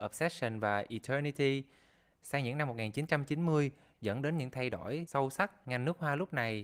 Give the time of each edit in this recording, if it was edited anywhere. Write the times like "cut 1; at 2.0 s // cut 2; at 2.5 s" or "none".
cut 1; at 3.9 s